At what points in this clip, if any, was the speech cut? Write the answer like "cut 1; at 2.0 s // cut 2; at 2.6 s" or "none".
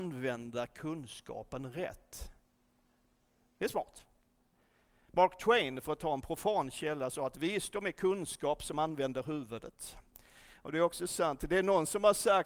none